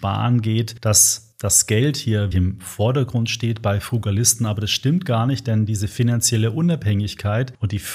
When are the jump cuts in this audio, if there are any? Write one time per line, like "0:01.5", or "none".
0:02.3